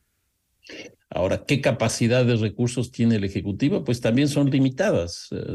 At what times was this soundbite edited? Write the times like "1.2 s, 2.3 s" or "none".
1.0 s

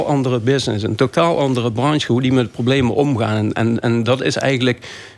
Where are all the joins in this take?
2.1 s

